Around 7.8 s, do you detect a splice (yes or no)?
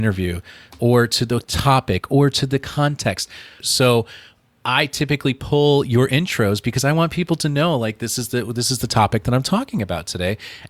no